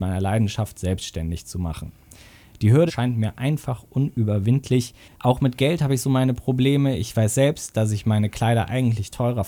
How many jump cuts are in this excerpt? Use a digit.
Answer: 1